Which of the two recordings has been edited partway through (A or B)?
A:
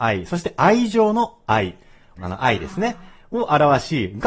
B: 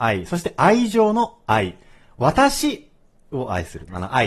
A